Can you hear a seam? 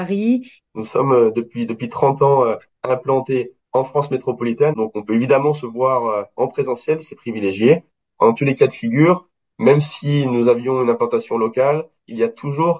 yes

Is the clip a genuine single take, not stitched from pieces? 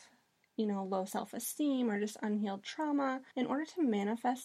yes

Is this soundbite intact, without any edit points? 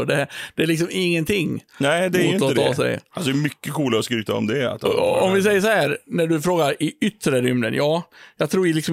yes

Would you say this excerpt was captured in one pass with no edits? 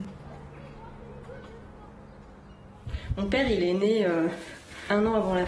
yes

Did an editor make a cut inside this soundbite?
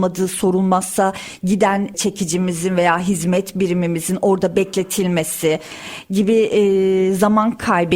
no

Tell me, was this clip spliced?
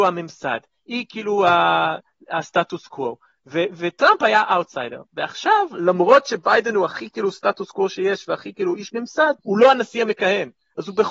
yes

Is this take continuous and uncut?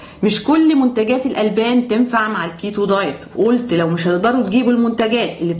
yes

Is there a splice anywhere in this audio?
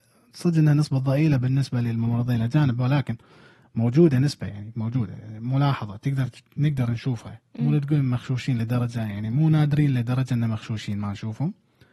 no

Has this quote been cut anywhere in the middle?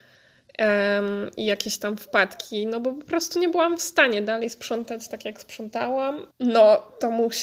yes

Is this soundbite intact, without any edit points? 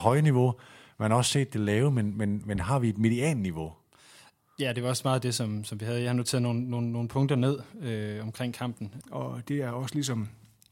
no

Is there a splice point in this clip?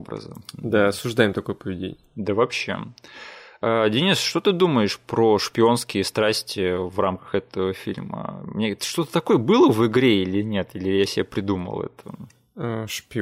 no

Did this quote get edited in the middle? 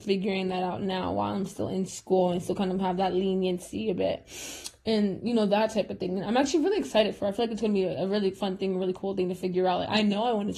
no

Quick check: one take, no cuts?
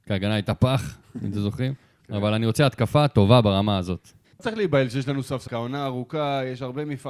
no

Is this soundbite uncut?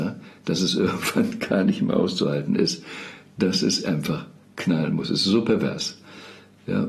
yes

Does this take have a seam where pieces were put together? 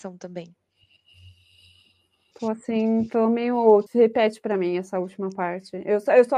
yes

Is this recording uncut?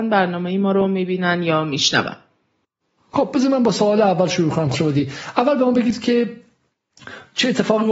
no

